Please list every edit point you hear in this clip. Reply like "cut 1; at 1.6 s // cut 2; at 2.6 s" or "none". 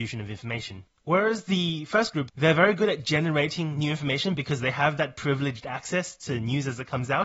cut 1; at 1.0 s // cut 2; at 2.3 s

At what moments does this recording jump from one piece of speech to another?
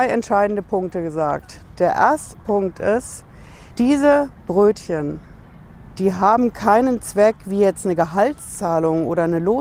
cut 1; at 3.7 s

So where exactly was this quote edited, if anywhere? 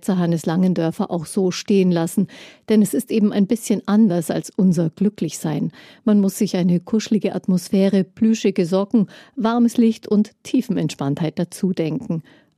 none

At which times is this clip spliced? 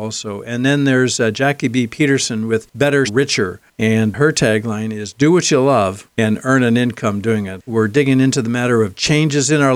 cut 1; at 3.1 s // cut 2; at 7.7 s

